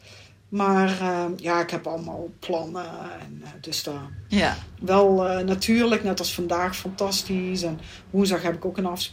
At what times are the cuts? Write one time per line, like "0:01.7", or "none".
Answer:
0:04.3